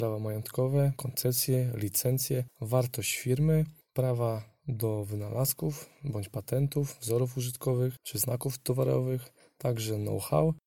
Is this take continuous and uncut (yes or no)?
no